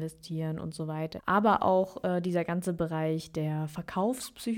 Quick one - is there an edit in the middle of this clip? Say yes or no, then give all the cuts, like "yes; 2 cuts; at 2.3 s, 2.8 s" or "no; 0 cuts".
yes; 1 cut; at 1.2 s